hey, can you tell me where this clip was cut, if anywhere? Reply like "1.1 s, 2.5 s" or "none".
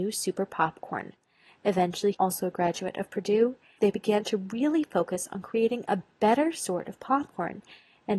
2.1 s, 3.8 s